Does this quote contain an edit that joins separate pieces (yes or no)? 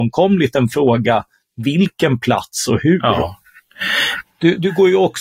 yes